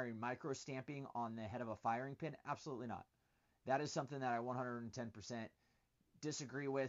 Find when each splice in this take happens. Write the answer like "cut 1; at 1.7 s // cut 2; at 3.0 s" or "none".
none